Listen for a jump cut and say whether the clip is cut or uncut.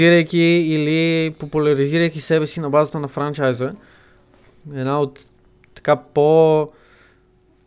uncut